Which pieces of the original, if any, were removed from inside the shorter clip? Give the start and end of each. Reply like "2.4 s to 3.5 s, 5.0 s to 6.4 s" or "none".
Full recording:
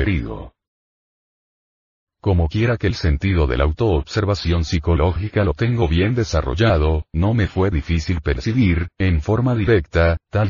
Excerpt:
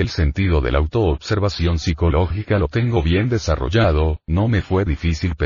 none